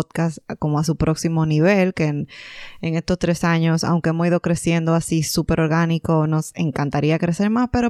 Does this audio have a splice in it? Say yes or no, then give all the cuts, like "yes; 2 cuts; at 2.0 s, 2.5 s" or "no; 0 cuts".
no; 0 cuts